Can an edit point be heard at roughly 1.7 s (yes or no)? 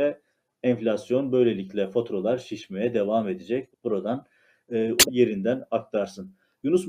no